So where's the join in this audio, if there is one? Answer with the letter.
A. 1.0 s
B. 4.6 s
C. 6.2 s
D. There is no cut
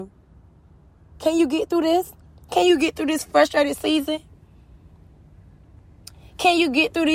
D